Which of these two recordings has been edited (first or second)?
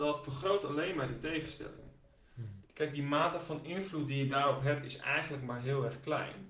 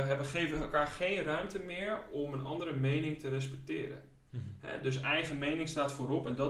first